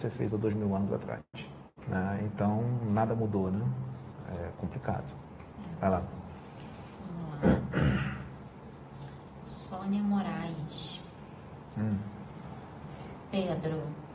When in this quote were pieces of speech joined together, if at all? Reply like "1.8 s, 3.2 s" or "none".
none